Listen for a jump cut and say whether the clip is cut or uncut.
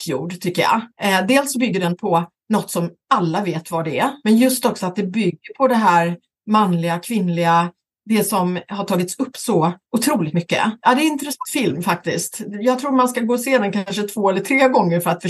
uncut